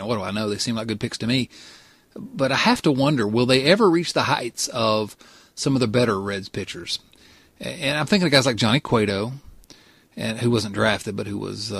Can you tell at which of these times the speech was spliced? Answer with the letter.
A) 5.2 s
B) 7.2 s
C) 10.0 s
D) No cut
D